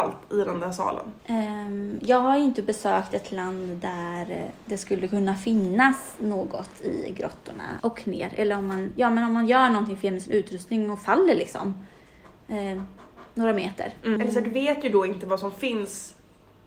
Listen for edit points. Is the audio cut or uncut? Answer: cut